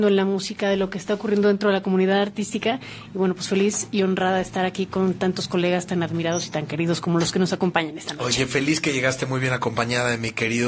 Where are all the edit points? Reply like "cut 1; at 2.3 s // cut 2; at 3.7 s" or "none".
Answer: none